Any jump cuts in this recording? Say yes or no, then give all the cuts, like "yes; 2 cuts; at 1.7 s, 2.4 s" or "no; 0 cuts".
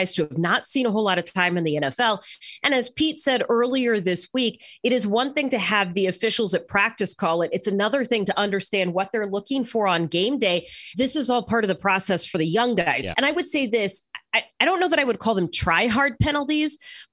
yes; 2 cuts; at 10.9 s, 13.1 s